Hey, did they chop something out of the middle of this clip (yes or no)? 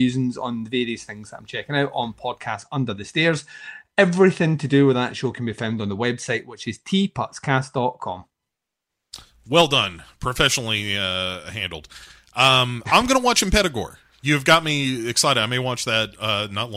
no